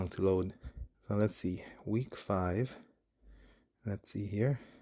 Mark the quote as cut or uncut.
cut